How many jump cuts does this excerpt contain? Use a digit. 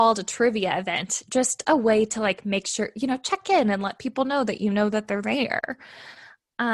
0